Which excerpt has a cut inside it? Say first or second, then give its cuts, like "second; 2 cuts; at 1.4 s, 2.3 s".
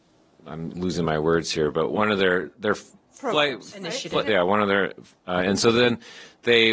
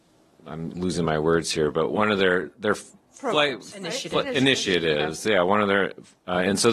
first; 1 cut; at 4.3 s